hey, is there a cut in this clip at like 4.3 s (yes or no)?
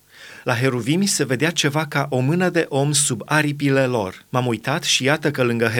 yes